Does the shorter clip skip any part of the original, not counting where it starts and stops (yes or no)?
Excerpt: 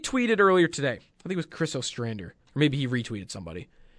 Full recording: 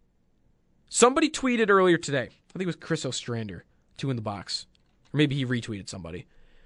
yes